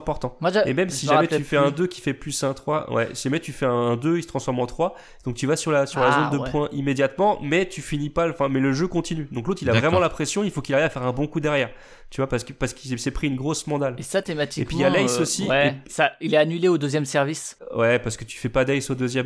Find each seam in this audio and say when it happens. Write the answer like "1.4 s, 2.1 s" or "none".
none